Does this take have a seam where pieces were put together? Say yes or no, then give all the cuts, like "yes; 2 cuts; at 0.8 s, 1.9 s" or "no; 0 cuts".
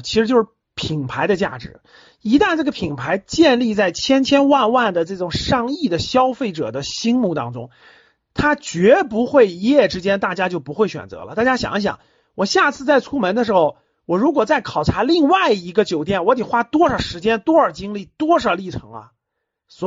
no; 0 cuts